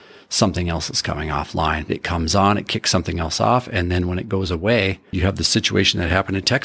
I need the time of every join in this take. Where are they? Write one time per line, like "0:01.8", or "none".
0:01.9